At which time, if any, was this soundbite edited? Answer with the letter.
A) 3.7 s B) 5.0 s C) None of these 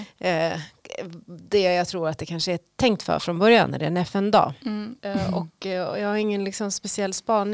B